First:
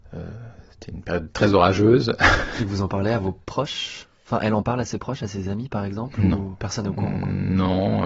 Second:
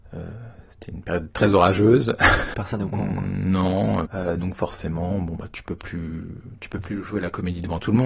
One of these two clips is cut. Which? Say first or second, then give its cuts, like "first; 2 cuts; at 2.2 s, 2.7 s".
second; 2 cuts; at 2.5 s, 4.1 s